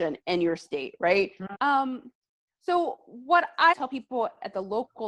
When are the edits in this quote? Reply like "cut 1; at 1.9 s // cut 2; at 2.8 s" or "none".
cut 1; at 1.5 s // cut 2; at 3.7 s